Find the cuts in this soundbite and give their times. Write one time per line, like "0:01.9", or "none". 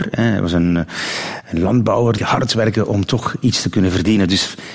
0:02.2